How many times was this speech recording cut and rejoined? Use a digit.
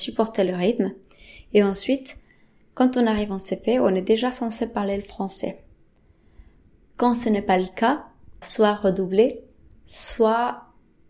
1